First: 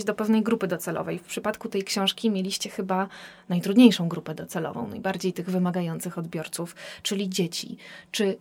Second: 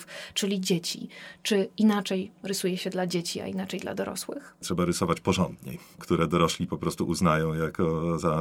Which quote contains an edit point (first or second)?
second